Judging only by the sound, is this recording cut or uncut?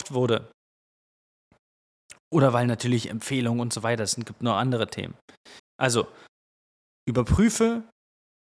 cut